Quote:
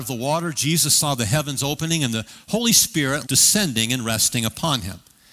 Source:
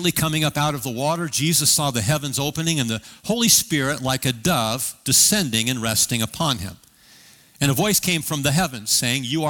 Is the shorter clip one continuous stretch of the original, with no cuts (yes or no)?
no